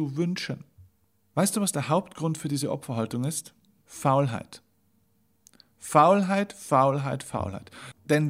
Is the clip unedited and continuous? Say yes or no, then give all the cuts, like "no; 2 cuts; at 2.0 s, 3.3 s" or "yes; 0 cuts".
no; 2 cuts; at 1.3 s, 3.8 s